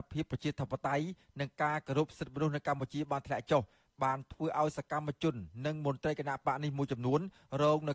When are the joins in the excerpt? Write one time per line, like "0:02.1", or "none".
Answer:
none